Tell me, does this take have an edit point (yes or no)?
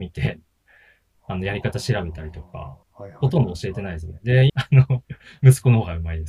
yes